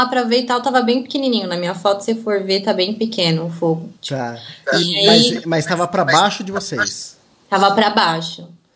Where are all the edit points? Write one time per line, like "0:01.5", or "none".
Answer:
0:04.0